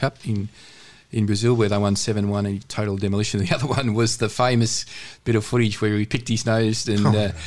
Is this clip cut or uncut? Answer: cut